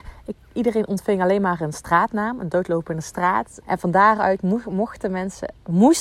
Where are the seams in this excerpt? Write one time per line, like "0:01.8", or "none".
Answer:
0:03.6